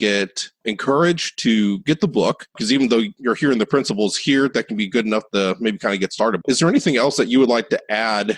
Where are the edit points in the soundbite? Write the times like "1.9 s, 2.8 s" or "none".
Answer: 6.4 s